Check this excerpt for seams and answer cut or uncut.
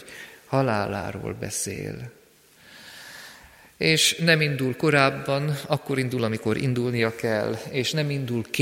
uncut